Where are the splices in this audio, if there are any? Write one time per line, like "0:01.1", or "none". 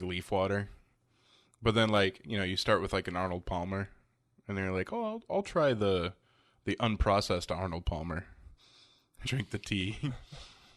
0:09.3